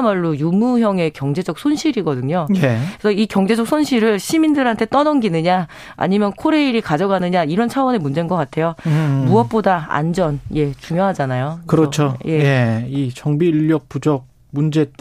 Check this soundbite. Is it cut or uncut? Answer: uncut